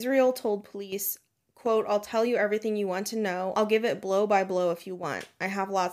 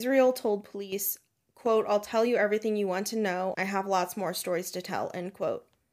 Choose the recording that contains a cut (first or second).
second